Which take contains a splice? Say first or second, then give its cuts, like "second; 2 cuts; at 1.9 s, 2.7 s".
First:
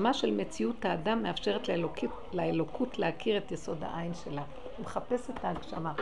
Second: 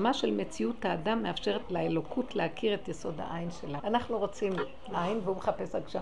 second; 2 cuts; at 1.6 s, 3.8 s